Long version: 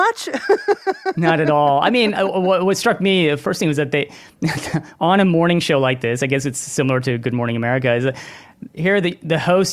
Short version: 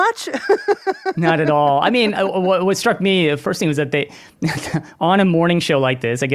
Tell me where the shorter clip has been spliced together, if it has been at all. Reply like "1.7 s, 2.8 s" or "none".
none